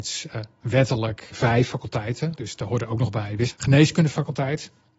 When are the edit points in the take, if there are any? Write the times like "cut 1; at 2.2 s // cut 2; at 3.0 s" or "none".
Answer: cut 1; at 3.5 s

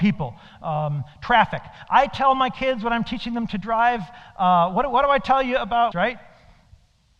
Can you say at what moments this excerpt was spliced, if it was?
cut 1; at 5.9 s

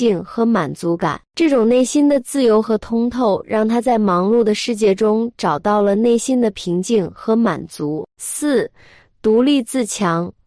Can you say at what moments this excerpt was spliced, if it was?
cut 1; at 1.3 s

